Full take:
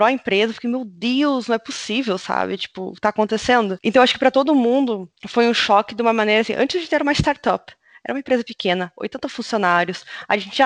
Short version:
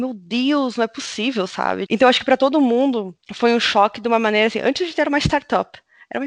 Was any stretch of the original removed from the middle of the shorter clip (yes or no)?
yes